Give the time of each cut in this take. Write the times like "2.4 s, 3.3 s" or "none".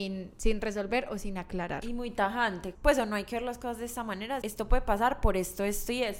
2.7 s, 4.4 s